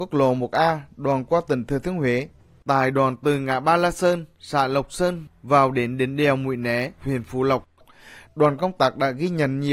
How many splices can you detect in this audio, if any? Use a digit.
1